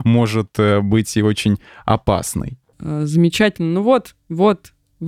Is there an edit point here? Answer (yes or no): yes